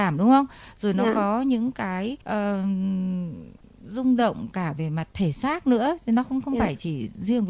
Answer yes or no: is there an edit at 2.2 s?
yes